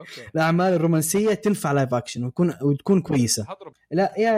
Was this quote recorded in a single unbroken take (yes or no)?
yes